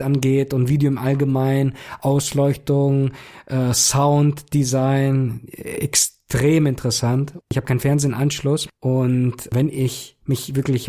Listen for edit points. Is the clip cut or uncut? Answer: cut